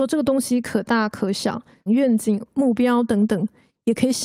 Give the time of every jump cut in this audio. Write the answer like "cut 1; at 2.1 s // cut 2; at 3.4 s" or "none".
cut 1; at 1.9 s